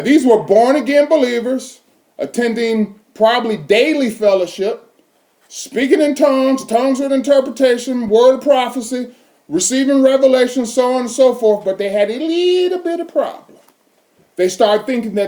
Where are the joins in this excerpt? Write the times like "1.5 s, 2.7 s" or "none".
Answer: none